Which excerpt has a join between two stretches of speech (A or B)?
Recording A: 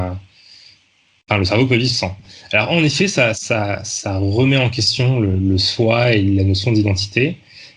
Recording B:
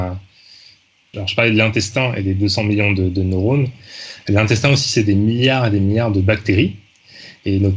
B